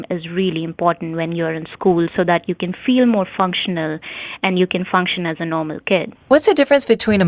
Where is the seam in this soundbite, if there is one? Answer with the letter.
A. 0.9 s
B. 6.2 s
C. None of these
B